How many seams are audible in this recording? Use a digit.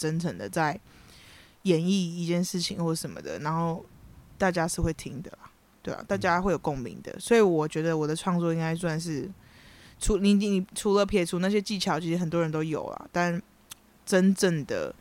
0